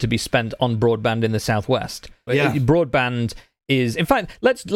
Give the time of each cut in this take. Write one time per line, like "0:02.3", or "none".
0:02.3